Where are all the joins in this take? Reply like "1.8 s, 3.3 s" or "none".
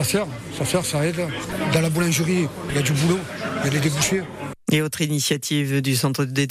none